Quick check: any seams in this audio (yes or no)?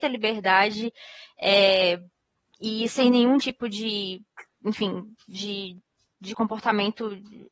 no